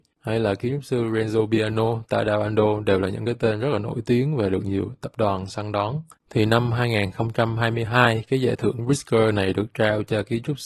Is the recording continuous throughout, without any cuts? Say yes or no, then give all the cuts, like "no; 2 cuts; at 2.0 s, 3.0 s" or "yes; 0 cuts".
no; 1 cut; at 6.2 s